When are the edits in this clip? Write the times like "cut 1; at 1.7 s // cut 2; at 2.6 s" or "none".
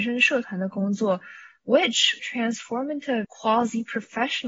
cut 1; at 2.2 s // cut 2; at 3.2 s